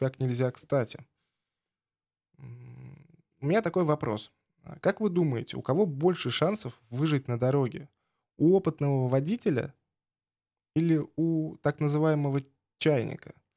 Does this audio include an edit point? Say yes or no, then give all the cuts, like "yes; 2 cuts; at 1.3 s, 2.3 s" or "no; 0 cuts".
no; 0 cuts